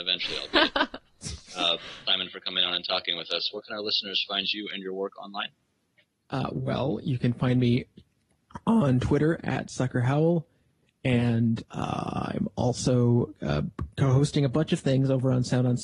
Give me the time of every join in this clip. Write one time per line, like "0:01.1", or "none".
0:02.1